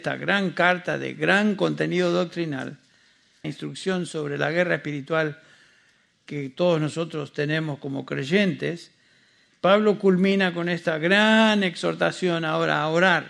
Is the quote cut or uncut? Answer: cut